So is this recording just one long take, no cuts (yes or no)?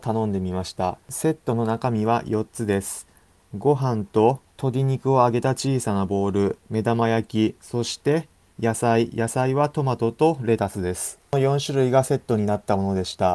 yes